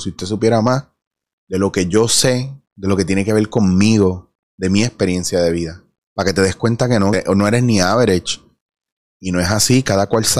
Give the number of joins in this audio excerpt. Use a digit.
3